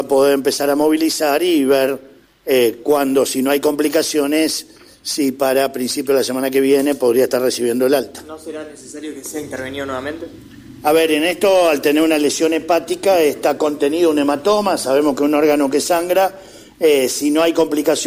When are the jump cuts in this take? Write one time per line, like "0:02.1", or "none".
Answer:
none

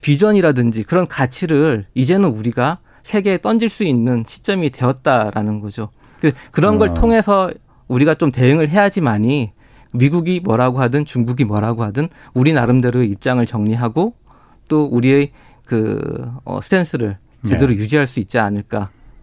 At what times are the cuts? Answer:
none

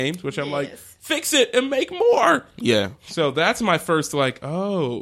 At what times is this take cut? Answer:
none

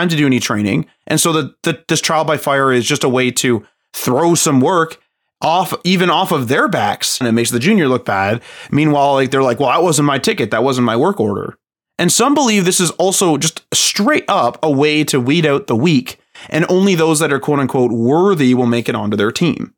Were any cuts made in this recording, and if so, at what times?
0:07.2

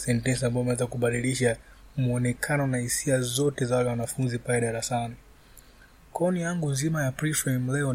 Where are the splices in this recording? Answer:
none

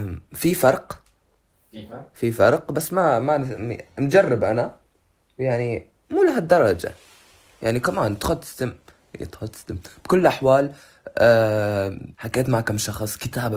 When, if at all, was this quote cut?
0:12.1

